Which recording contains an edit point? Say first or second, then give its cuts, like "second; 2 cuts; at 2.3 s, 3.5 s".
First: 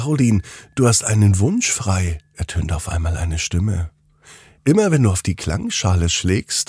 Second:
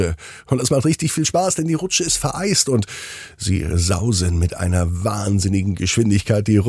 first; 1 cut; at 2.2 s